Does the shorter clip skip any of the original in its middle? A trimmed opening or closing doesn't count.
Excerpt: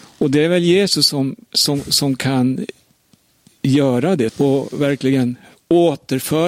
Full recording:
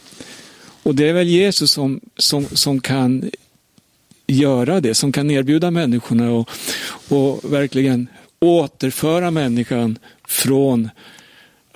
yes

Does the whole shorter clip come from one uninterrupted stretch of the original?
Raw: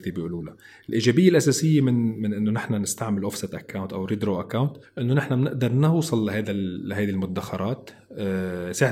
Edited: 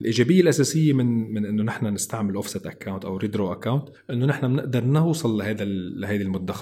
yes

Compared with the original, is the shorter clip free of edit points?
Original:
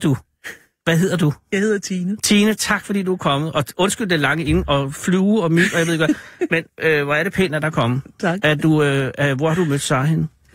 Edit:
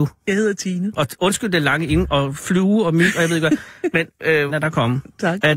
no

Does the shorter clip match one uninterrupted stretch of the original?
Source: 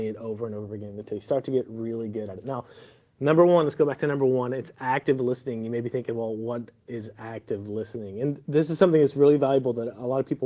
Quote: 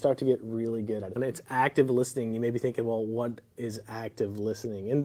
no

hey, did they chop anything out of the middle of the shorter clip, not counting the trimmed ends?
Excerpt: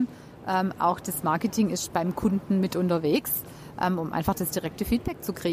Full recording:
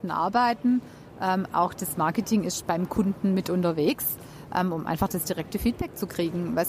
no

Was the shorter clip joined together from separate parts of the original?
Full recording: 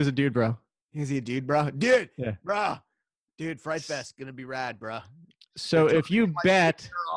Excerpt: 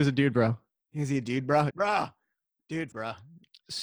yes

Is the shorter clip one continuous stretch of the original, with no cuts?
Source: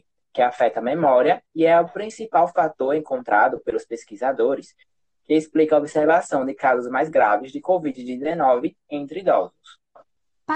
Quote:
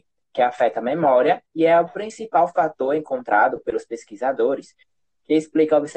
yes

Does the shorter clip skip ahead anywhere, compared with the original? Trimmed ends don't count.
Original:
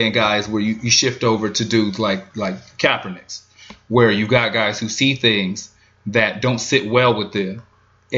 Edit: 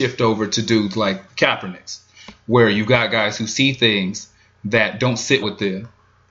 yes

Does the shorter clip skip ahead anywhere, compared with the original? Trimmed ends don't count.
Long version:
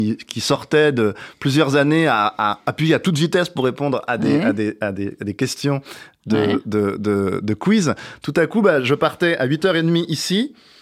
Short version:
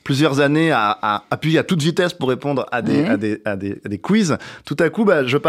yes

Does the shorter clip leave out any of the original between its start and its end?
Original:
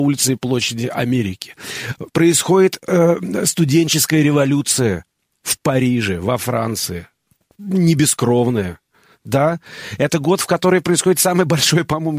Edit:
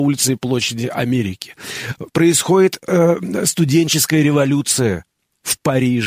no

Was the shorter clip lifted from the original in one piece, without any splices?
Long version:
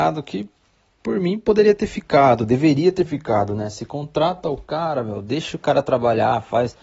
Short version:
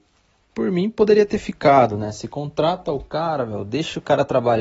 no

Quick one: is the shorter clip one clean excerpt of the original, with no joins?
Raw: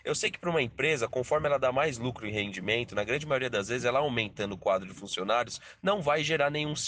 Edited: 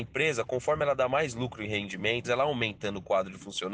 no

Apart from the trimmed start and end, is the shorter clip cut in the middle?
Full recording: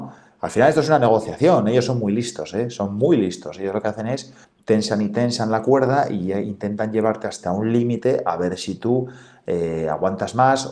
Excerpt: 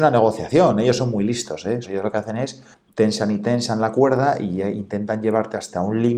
yes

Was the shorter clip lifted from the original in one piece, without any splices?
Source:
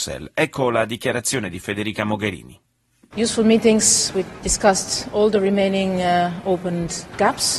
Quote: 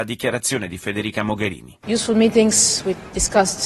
no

